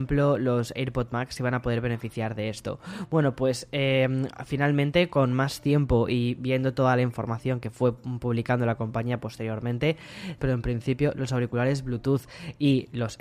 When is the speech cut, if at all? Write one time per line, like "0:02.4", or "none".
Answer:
0:10.4